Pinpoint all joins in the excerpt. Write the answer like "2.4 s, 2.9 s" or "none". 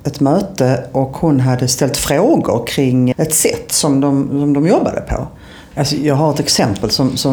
3.1 s, 5.7 s